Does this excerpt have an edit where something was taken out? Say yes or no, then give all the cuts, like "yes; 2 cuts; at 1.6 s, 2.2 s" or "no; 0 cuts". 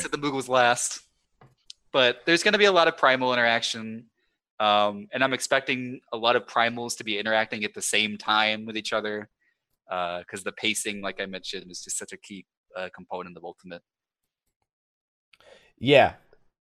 no; 0 cuts